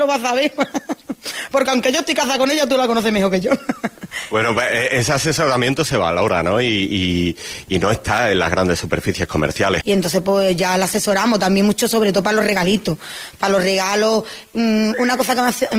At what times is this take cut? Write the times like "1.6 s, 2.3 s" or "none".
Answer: 9.8 s